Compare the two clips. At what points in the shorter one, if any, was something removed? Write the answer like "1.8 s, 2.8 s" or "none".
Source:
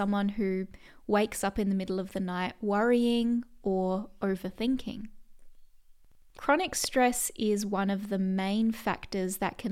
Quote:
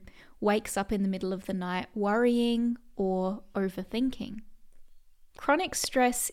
5.3 s